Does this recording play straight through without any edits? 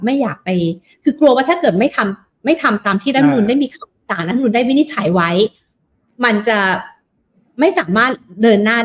yes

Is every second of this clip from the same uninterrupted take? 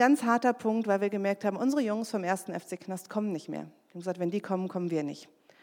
yes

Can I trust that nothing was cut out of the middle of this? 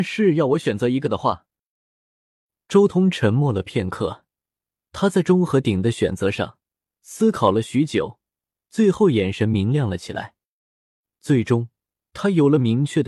yes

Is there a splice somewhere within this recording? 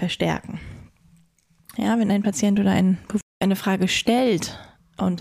yes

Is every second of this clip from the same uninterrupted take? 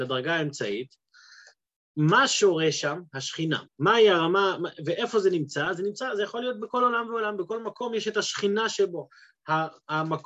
no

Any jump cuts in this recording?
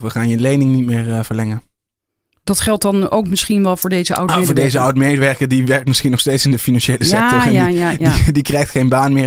no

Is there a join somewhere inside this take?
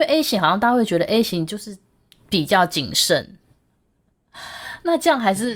yes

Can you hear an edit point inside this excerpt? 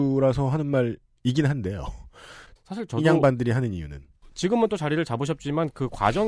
yes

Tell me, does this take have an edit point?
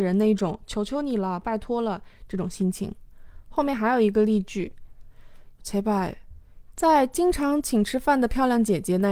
yes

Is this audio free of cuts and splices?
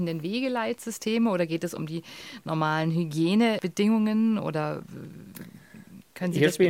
yes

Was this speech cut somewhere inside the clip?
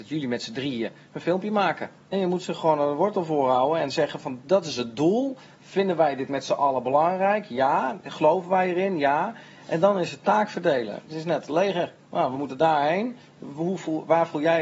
yes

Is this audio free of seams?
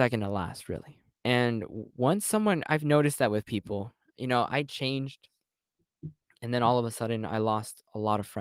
no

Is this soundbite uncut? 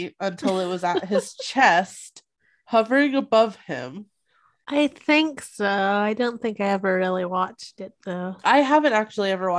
no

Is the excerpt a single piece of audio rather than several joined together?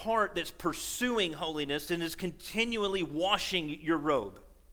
no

